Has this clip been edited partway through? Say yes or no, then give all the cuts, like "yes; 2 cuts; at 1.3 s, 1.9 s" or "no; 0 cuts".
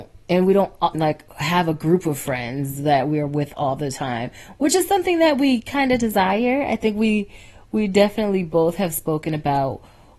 yes; 1 cut; at 0.9 s